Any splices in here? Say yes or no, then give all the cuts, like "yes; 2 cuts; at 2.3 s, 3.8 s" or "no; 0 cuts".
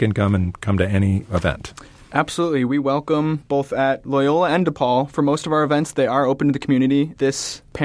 no; 0 cuts